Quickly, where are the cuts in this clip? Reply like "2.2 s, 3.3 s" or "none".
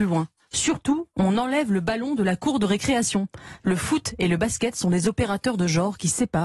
3.6 s